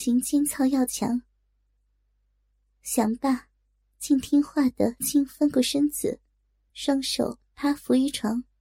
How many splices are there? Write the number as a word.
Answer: two